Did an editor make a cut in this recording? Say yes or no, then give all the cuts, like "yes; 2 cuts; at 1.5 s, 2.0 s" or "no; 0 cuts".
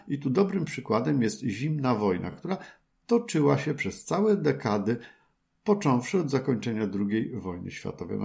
no; 0 cuts